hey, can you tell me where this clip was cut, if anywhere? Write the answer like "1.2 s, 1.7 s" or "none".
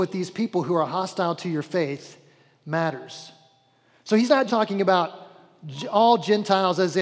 4.5 s